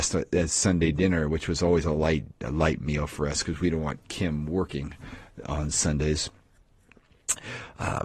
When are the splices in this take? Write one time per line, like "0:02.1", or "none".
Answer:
none